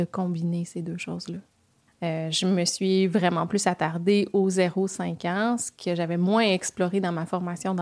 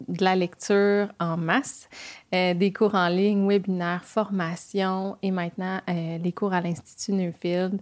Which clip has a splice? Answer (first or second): first